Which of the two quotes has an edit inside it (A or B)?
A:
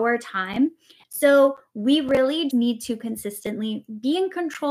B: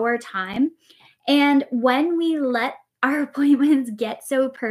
A